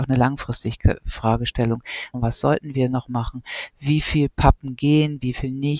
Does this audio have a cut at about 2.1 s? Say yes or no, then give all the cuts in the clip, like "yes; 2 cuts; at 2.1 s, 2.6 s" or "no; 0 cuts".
yes; 1 cut; at 2.1 s